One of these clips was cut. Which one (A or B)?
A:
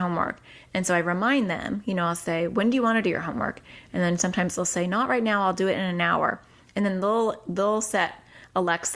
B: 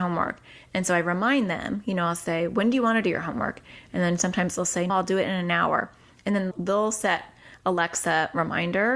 B